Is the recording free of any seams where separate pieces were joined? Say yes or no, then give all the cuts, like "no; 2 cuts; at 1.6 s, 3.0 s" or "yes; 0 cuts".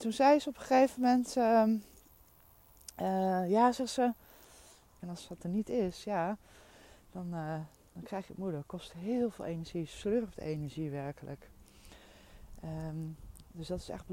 no; 1 cut; at 5.0 s